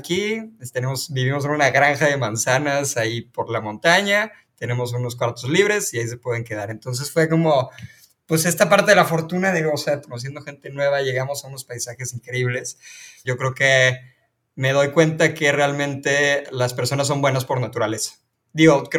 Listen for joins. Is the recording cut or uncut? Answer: cut